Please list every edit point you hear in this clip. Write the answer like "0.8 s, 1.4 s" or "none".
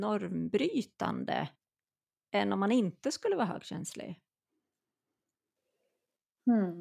none